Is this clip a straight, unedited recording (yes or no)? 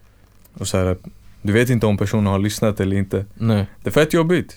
yes